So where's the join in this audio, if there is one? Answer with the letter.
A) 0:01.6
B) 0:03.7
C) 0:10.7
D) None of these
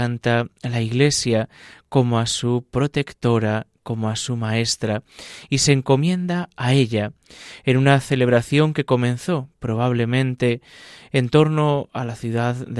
D